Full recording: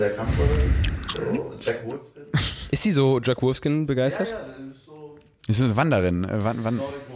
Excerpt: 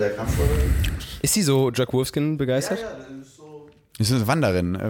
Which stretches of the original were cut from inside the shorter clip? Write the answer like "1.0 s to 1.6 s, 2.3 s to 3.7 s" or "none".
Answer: 1.0 s to 2.5 s